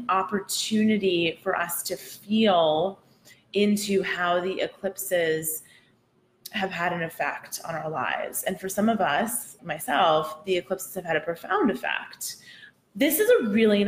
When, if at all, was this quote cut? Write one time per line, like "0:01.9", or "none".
0:09.6
0:12.7